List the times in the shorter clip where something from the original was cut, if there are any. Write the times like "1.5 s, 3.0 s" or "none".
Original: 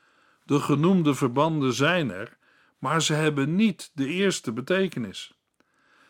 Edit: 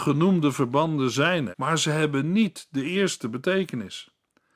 1.5 s